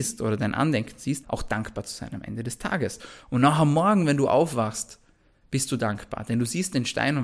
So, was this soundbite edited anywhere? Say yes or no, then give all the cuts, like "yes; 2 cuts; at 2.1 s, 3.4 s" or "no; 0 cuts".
yes; 1 cut; at 1.2 s